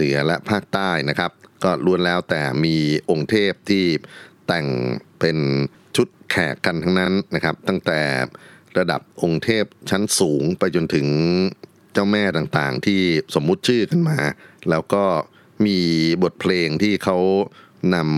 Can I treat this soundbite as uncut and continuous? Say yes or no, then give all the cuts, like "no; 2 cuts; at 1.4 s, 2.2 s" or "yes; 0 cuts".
yes; 0 cuts